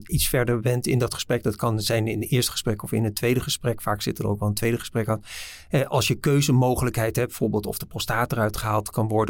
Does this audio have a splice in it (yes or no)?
no